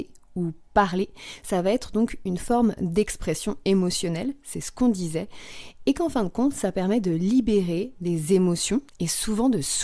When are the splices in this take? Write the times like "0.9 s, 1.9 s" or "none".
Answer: 8.9 s

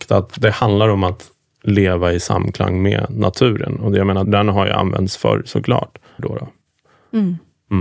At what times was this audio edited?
4.2 s, 6.2 s

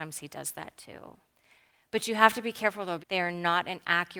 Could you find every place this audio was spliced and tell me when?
3.0 s

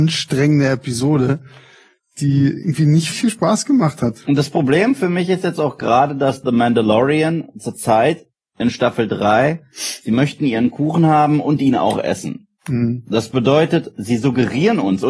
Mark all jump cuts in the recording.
3.1 s

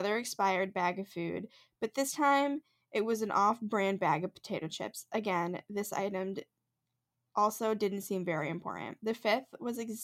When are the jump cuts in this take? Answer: none

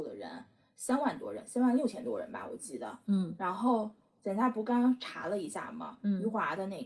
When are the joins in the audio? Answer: none

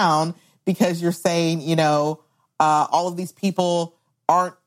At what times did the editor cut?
none

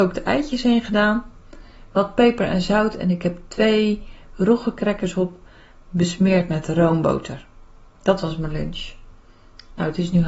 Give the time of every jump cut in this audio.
none

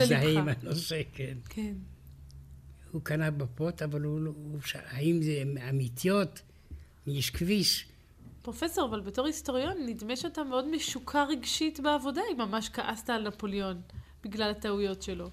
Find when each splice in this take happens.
1.4 s, 8.4 s

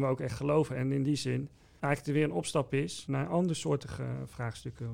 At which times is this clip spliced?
none

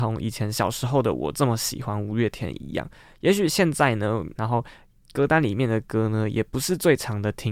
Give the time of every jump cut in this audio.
4.4 s

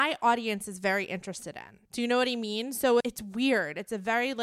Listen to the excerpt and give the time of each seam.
1.9 s, 3.0 s

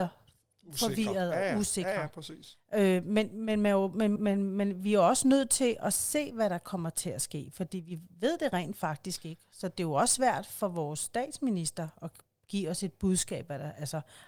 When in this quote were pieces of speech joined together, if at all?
4.2 s

